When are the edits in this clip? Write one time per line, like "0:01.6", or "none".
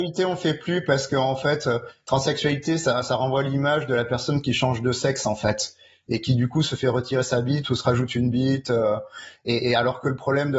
none